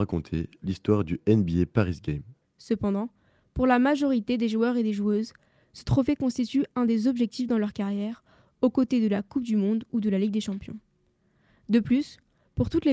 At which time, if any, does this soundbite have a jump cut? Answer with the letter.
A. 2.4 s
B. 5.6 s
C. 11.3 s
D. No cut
A